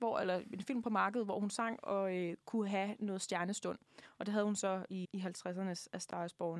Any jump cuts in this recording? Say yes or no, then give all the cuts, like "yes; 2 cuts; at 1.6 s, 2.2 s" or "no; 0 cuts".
yes; 1 cut; at 5.0 s